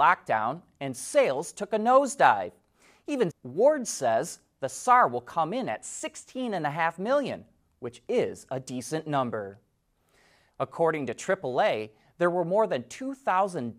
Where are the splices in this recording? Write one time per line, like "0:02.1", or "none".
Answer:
0:03.3
0:10.5